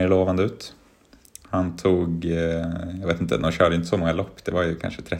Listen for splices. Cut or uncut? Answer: uncut